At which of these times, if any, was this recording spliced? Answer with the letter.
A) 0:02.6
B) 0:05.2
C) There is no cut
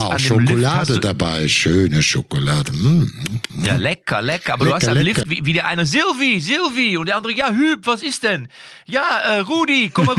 B